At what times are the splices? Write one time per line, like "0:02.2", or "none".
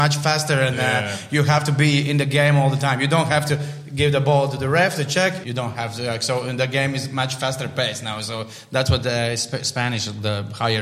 0:05.4